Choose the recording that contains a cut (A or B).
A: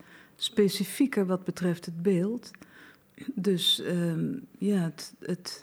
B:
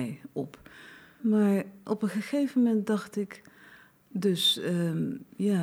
B